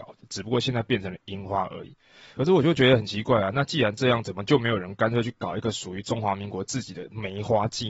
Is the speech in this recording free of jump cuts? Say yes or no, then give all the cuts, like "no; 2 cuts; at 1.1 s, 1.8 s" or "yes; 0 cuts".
yes; 0 cuts